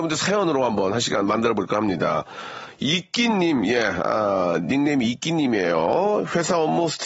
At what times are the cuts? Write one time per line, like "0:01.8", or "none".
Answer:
none